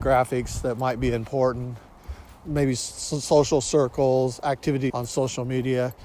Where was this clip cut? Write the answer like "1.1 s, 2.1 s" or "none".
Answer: 2.4 s, 4.9 s